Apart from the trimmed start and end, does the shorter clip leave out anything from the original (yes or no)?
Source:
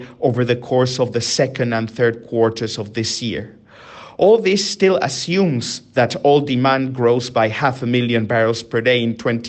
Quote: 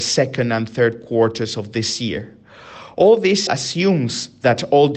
yes